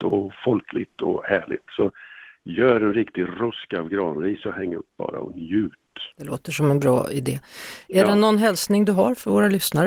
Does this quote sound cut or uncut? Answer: cut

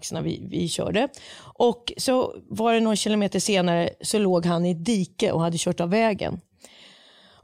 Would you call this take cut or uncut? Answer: uncut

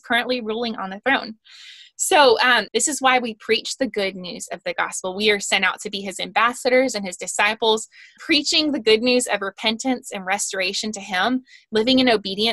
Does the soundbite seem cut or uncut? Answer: cut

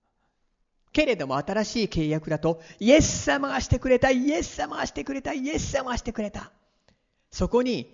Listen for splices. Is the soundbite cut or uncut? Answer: uncut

